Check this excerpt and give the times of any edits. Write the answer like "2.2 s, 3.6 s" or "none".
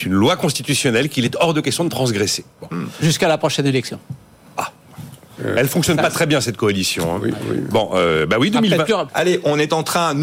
9.1 s